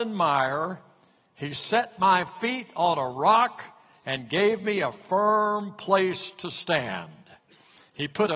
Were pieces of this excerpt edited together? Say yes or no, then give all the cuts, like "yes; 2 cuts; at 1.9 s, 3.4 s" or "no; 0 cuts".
no; 0 cuts